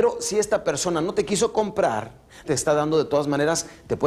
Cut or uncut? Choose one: cut